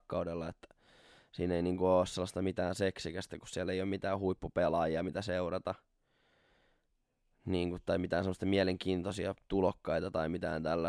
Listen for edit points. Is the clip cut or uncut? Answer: uncut